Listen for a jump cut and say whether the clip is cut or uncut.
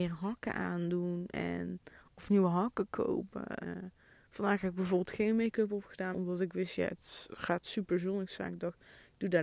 cut